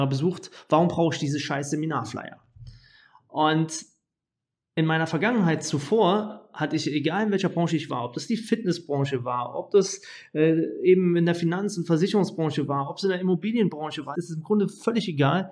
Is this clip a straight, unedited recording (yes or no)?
no